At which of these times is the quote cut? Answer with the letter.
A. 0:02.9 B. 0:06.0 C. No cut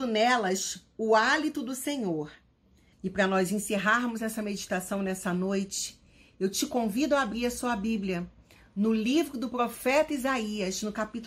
A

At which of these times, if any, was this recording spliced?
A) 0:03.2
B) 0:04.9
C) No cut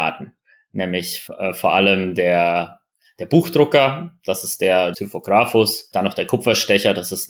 B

